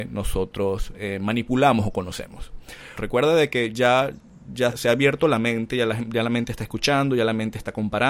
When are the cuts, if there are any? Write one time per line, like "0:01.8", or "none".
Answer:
0:03.0
0:04.7